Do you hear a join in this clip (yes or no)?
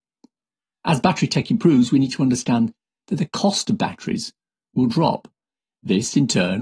no